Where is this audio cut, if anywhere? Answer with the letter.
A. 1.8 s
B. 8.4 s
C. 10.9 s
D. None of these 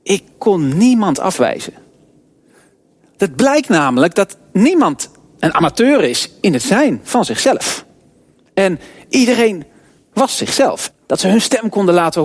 C